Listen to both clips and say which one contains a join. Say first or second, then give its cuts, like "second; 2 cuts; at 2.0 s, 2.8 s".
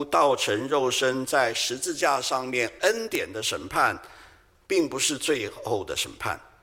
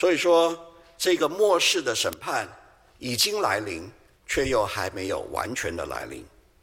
second; 1 cut; at 4.2 s